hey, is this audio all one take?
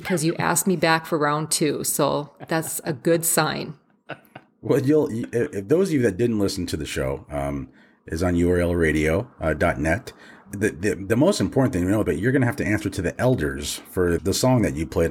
no; 3 cuts; at 10.5 s, 12.0 s, 14.2 s

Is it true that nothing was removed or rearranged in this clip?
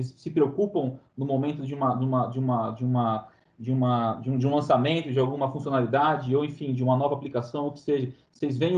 yes; 0 cuts

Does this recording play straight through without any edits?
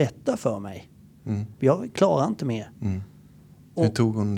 no; 2 cuts; at 1.6 s, 2.7 s

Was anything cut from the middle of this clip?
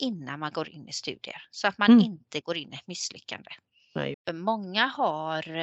yes; 1 cut; at 4.1 s

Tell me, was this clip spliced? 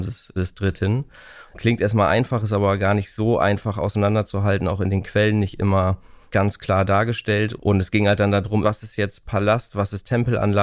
yes; 3 cuts; at 1.5 s, 7.6 s, 8.6 s

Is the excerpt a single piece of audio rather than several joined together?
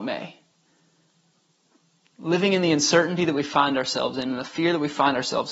yes; 0 cuts

